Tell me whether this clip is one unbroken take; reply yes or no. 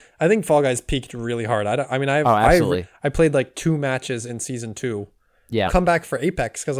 no